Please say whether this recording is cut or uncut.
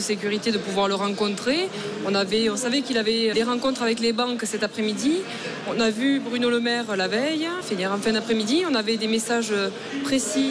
cut